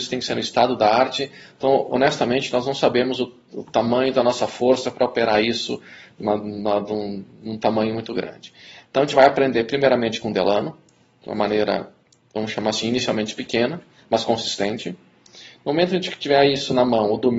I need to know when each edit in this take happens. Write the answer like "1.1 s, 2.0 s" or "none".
none